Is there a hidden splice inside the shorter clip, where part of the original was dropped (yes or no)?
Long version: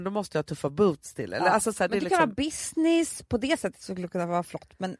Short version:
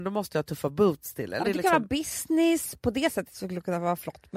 yes